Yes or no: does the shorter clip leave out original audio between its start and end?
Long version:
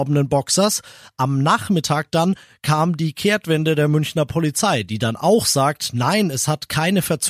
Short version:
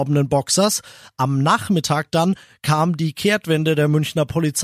no